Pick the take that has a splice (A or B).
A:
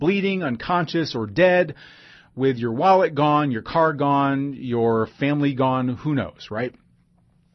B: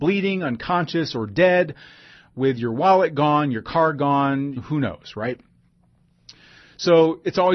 B